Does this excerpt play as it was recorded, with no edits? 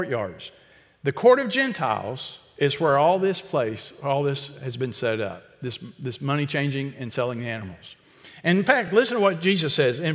yes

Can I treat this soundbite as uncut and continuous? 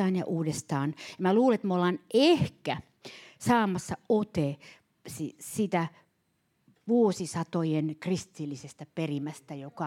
yes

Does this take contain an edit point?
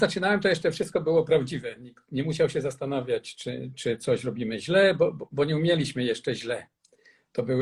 no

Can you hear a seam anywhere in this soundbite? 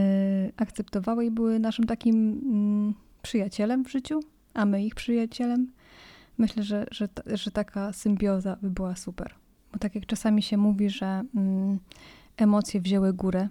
no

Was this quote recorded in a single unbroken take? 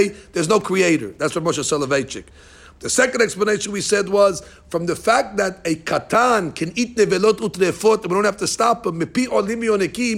yes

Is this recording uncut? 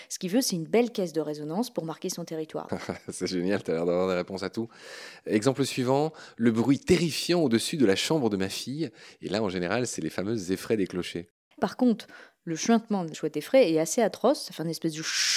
no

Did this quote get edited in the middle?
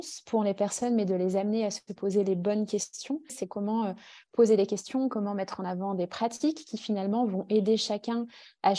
yes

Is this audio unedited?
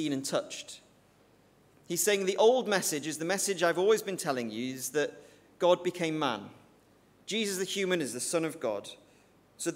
yes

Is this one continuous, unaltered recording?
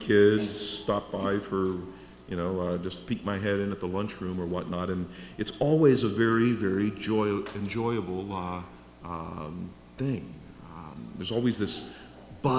yes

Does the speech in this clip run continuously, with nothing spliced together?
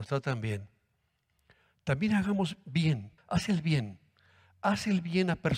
no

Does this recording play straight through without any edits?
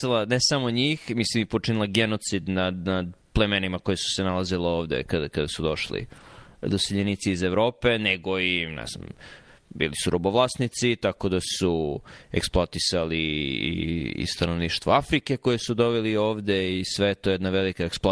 yes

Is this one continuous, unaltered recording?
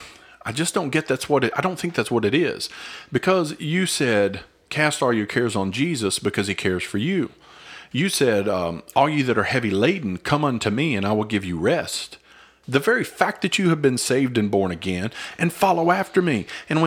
no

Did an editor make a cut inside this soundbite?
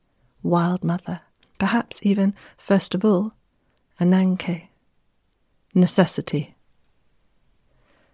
no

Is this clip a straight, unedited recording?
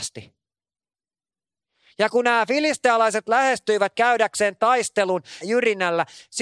no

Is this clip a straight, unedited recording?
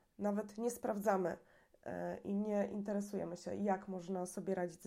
yes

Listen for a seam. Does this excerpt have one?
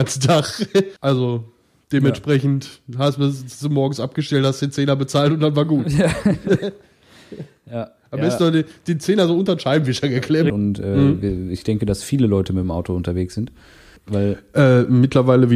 yes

